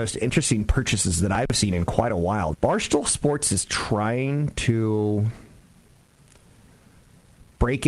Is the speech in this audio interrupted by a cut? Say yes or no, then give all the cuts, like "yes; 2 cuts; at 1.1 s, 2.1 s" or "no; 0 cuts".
yes; 1 cut; at 2.5 s